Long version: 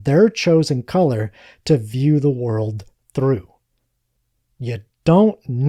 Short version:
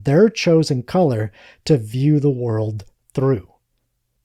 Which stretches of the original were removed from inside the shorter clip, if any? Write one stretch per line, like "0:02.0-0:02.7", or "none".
none